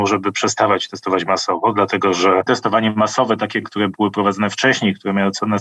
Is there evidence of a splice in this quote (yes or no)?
no